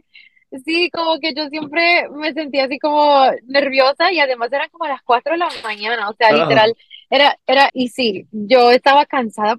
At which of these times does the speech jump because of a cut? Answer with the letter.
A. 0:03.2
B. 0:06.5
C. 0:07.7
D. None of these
C